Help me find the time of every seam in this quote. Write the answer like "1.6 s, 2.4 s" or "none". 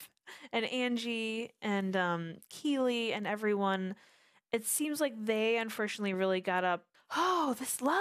6.9 s